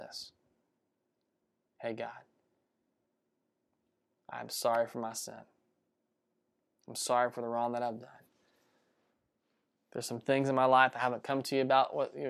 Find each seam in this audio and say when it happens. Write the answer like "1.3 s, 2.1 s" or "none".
none